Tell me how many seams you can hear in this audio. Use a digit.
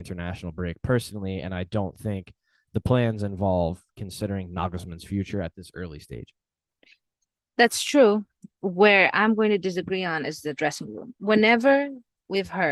0